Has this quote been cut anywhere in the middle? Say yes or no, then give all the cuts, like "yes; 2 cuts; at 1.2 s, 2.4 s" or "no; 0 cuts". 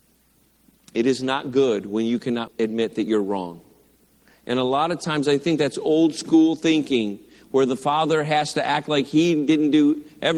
yes; 1 cut; at 2.5 s